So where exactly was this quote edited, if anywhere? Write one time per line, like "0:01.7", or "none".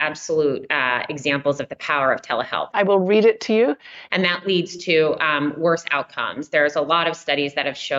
0:02.7
0:04.1